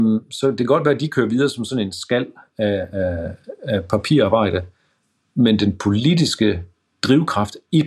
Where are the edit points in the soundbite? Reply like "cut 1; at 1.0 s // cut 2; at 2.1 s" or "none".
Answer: cut 1; at 2.9 s